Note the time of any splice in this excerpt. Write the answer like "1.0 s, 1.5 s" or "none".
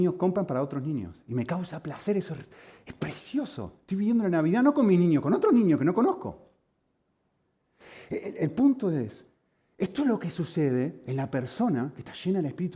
none